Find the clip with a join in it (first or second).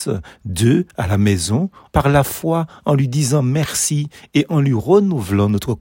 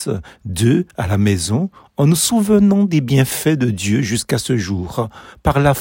first